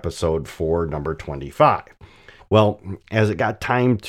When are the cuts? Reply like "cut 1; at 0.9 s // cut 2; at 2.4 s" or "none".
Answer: cut 1; at 2.4 s